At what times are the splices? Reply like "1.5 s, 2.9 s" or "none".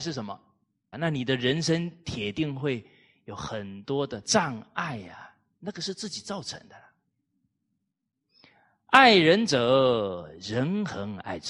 0.9 s